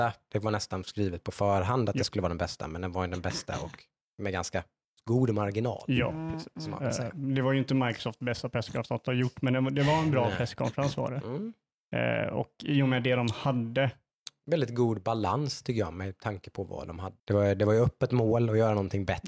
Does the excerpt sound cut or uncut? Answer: cut